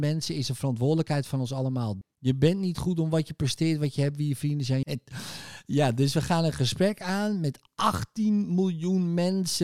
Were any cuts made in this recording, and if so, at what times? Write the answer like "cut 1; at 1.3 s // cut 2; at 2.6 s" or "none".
cut 1; at 2.0 s // cut 2; at 4.8 s

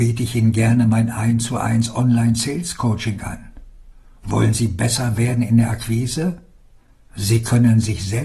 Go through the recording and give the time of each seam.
cut 1; at 7.1 s

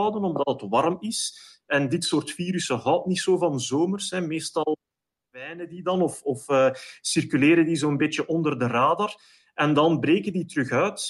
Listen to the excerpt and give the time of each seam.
none

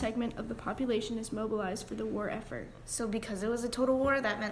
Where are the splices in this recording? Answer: none

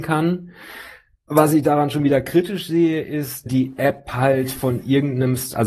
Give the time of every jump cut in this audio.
cut 1; at 3.5 s

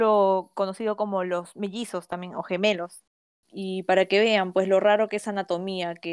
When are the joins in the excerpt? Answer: none

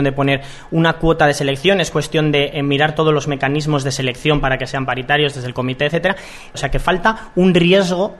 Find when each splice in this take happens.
cut 1; at 6.5 s

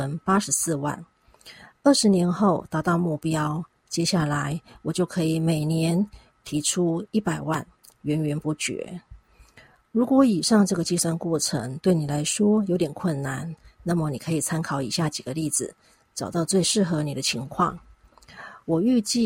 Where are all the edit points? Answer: none

